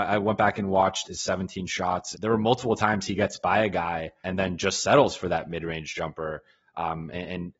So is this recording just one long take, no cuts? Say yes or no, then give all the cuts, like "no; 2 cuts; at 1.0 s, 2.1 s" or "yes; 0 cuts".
no; 3 cuts; at 1.0 s, 2.1 s, 4.2 s